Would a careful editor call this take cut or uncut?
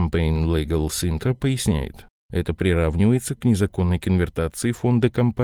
cut